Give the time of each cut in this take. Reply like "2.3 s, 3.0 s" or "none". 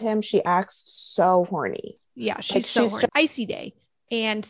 3.1 s